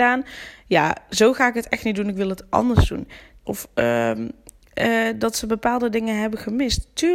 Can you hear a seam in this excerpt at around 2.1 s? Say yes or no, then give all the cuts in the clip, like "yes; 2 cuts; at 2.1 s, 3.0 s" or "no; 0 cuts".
no; 1 cut; at 3.5 s